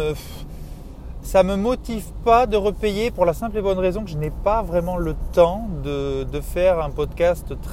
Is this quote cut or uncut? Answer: uncut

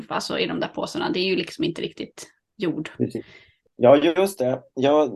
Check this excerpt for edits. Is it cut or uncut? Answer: cut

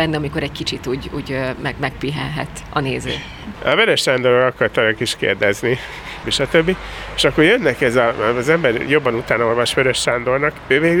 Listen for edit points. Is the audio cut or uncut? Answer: cut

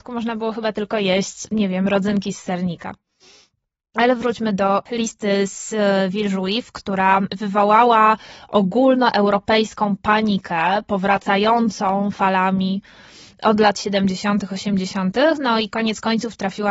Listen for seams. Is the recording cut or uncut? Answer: uncut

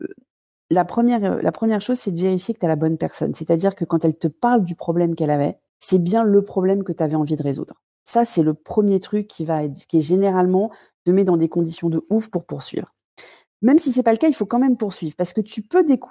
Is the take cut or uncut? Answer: cut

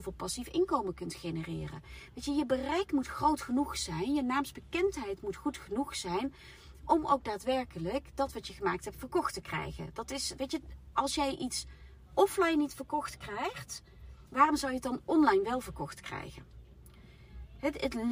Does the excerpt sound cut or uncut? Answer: uncut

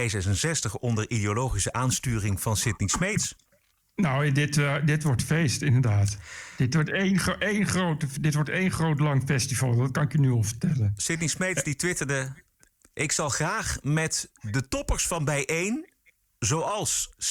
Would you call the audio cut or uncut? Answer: uncut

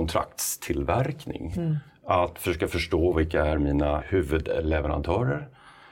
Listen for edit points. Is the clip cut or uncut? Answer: cut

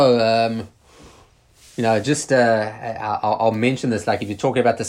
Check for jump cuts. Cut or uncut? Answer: cut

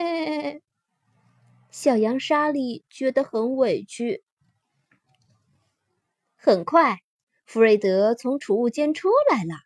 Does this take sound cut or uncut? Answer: uncut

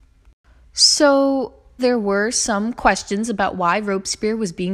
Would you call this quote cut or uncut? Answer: cut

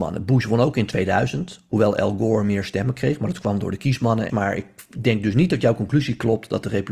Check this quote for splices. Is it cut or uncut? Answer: cut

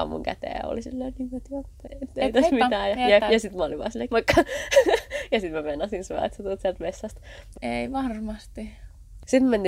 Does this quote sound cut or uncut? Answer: cut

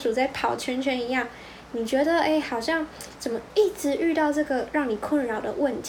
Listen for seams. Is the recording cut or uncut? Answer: uncut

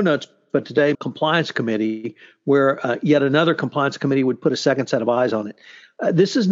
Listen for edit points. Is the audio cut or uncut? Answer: cut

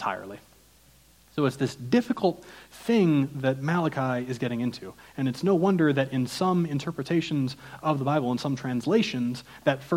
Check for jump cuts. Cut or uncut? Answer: uncut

